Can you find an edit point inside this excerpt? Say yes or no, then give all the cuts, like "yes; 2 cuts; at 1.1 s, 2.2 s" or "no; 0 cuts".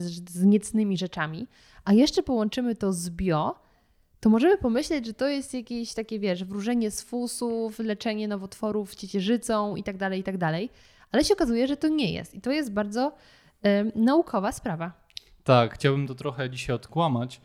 no; 0 cuts